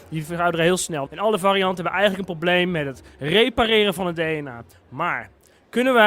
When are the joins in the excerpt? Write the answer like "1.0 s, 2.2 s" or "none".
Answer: 1.1 s, 4.7 s